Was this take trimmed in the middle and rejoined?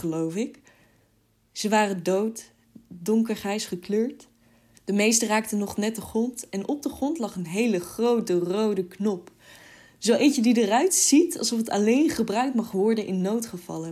yes; 1 cut; at 4.7 s

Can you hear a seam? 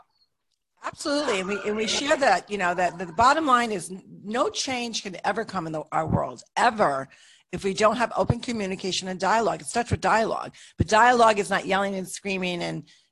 no; 0 cuts

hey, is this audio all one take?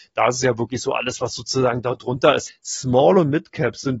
no; 1 cut; at 2.5 s

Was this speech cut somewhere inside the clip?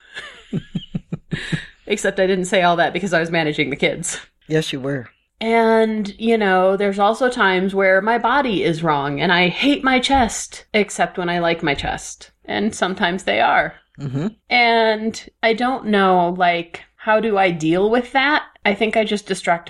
yes; 1 cut; at 12.4 s

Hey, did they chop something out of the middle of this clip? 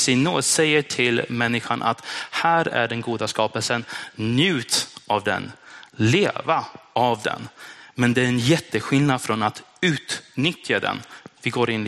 no; 0 cuts

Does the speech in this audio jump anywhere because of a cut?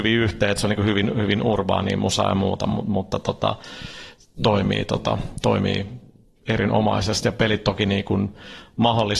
yes; 1 cut; at 4.4 s

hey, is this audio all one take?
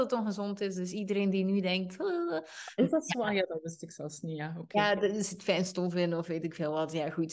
yes; 0 cuts

